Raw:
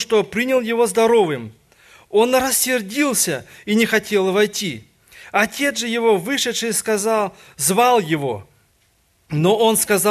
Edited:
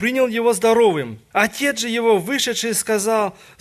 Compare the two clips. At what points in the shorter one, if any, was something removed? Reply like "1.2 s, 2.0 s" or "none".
1.3 s